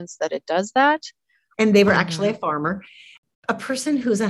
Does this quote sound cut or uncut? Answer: cut